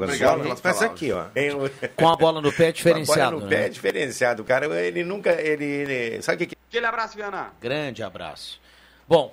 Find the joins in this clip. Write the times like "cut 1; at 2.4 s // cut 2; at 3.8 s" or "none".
cut 1; at 1.4 s // cut 2; at 6.5 s